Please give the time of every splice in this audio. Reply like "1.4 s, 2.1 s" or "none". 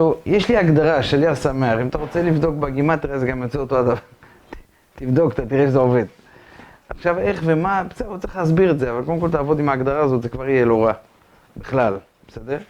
6.8 s